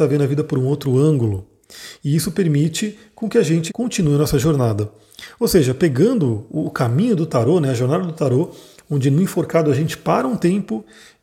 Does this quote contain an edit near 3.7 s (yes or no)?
yes